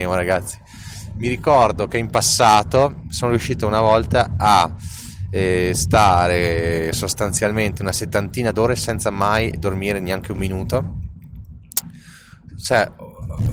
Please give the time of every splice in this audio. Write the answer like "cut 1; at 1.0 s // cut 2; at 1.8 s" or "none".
none